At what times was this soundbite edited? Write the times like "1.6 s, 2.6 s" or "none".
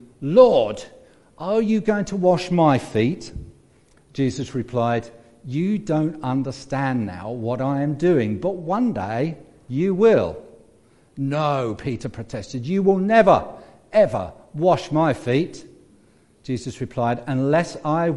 none

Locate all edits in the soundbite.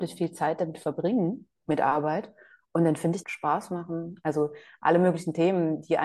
1.6 s, 3.2 s

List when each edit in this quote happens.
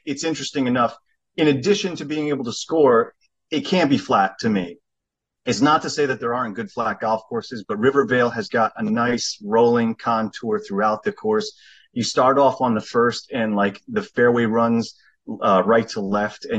none

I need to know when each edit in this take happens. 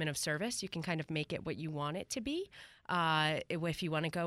none

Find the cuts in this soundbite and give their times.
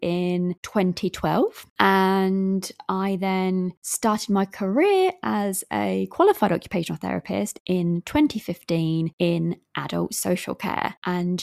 none

